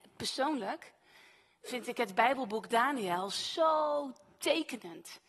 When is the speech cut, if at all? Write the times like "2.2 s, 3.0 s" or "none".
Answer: none